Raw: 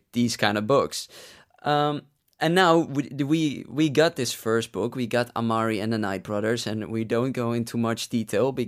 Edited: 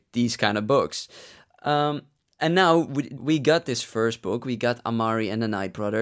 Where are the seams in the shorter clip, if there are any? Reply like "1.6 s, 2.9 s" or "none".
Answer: 3.2 s